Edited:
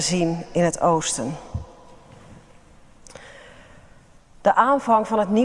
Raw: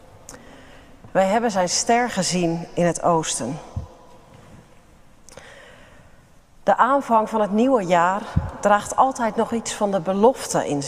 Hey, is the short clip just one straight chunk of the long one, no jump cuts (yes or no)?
yes